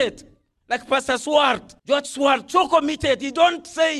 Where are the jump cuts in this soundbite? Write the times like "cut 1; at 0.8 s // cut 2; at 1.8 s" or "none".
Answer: cut 1; at 1.8 s